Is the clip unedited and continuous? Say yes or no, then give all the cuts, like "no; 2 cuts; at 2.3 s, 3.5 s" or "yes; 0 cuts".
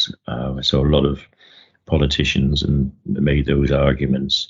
yes; 0 cuts